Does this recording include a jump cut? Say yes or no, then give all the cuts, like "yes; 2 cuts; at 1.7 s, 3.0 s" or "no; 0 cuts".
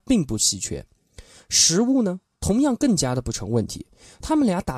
no; 0 cuts